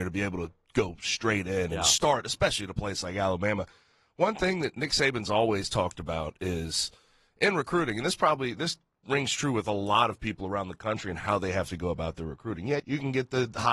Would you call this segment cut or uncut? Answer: cut